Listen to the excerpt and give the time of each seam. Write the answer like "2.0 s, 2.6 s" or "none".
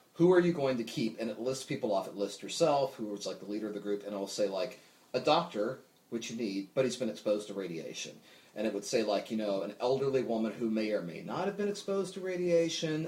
none